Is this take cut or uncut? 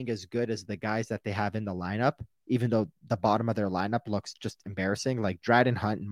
uncut